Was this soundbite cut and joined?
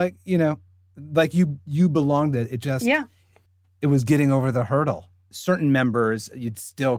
yes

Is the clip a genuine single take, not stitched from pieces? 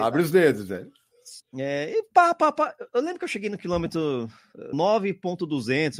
no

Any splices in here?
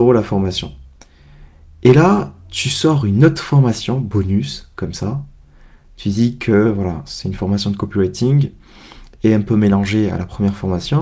no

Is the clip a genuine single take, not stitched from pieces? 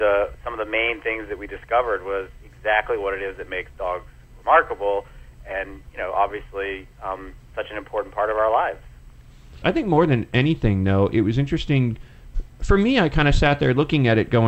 no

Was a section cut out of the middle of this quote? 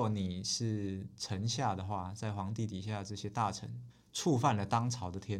yes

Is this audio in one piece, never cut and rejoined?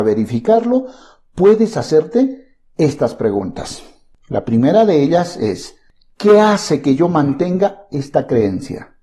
yes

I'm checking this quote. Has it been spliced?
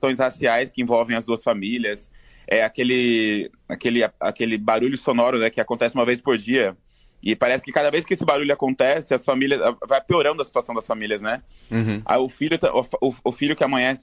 no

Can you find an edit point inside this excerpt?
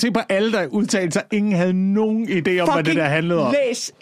no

